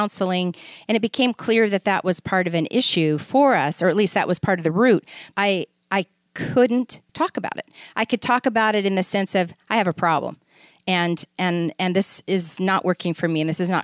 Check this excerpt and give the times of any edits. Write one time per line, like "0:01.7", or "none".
0:05.3
0:07.1